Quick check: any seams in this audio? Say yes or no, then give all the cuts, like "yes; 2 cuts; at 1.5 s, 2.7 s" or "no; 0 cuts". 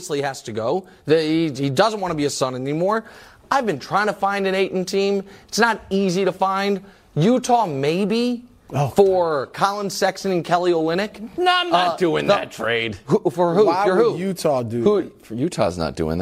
no; 0 cuts